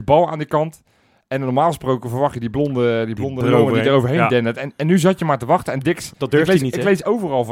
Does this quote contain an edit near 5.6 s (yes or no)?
no